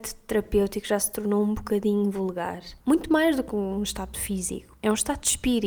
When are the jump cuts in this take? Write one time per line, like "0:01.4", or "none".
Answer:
0:02.8